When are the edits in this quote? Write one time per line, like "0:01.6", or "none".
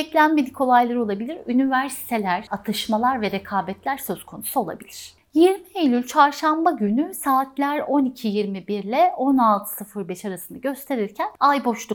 0:02.5